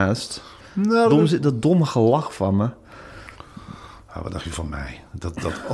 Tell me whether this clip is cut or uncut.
uncut